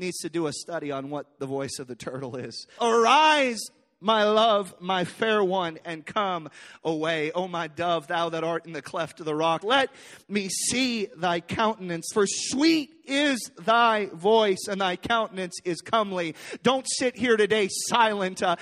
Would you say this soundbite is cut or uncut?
cut